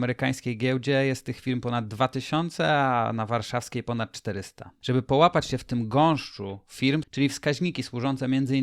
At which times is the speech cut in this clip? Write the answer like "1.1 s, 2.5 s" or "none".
7.0 s